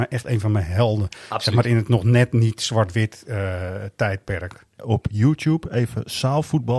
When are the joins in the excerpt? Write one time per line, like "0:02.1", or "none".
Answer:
0:04.8